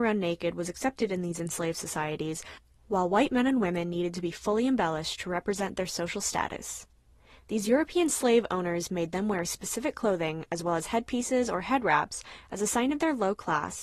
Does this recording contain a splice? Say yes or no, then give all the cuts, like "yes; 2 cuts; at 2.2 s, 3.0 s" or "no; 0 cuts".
no; 0 cuts